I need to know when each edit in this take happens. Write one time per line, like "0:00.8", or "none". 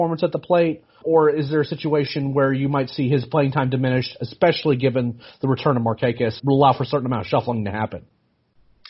0:01.0
0:06.4